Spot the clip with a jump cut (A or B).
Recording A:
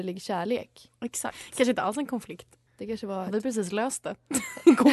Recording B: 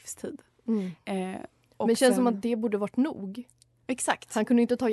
A